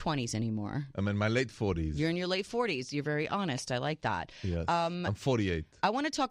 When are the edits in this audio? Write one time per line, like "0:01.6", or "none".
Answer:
none